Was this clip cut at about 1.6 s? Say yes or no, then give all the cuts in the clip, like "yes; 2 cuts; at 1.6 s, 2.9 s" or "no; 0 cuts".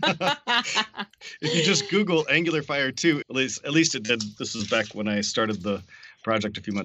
no; 1 cut; at 3.2 s